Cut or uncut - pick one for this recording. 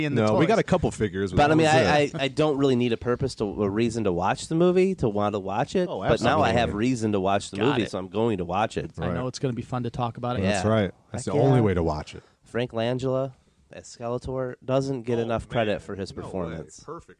cut